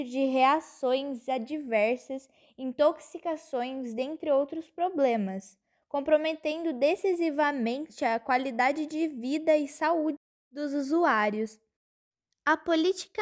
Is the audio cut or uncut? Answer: uncut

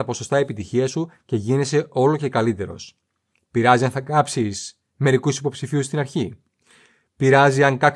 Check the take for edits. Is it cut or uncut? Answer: uncut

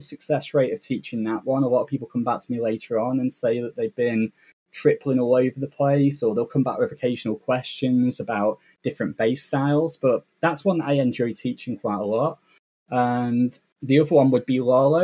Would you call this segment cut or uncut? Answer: uncut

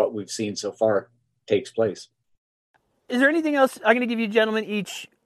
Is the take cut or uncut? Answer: uncut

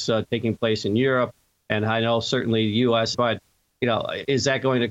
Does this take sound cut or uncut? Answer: cut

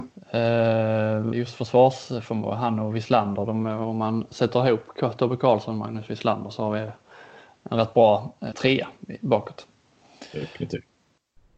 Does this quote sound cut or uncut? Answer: cut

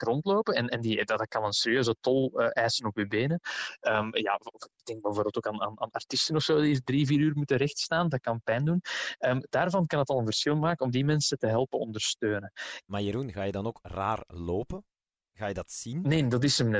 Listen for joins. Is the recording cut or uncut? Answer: uncut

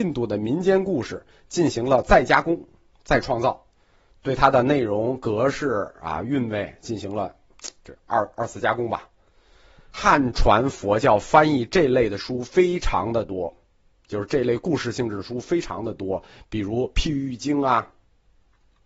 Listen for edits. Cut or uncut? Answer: uncut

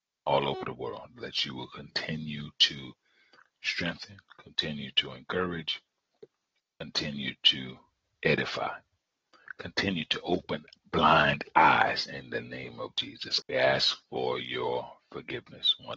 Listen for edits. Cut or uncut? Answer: cut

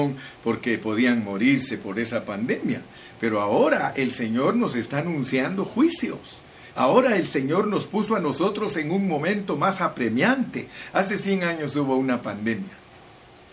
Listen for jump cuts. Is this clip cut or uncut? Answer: cut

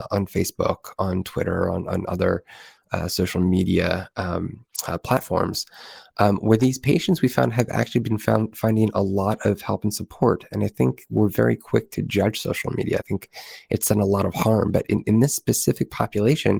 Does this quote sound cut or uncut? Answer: uncut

